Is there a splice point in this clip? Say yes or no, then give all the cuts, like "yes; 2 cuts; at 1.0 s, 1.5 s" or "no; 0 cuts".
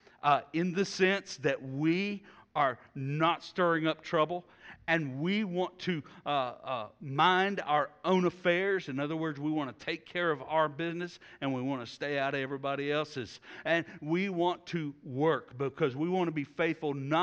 no; 0 cuts